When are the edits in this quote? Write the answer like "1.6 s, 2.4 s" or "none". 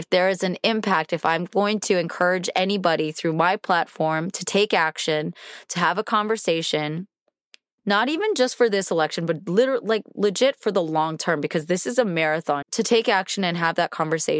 12.6 s